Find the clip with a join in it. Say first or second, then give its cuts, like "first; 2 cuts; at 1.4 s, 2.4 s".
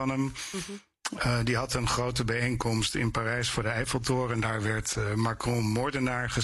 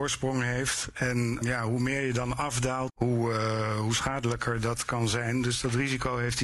second; 2 cuts; at 1.4 s, 2.9 s